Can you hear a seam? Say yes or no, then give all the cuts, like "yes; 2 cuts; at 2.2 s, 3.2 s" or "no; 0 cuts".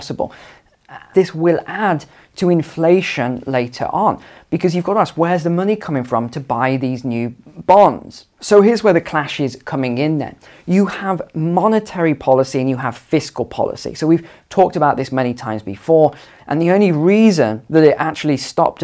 yes; 2 cuts; at 1.1 s, 16.4 s